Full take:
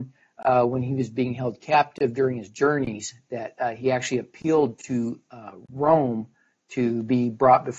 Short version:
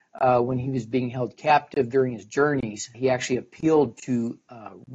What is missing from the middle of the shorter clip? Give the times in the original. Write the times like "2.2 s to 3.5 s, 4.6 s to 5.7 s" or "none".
3.2 s to 3.8 s